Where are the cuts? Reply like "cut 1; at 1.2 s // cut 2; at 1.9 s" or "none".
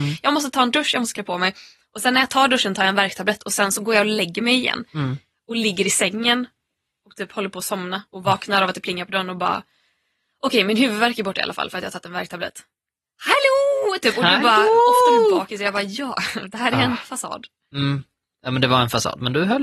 none